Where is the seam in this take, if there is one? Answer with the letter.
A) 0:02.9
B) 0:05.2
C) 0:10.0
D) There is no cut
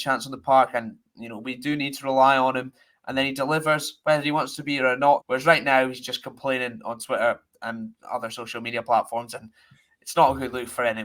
B